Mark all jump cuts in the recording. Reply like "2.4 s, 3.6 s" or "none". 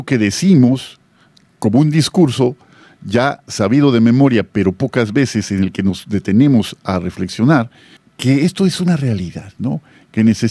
8.0 s